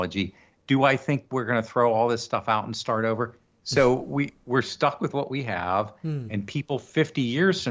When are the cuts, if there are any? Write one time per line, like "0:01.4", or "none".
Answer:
0:03.6